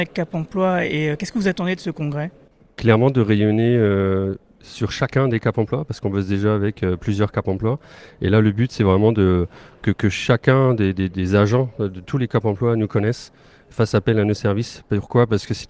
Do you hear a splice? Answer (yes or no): no